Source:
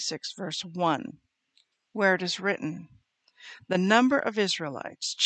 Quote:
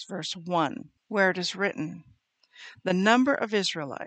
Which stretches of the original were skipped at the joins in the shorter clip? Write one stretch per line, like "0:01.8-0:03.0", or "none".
0:01.3-0:01.8